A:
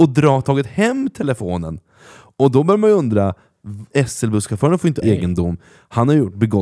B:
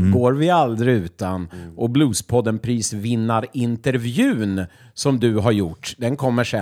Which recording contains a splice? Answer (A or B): A